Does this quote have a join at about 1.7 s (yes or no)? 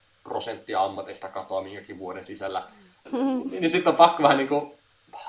no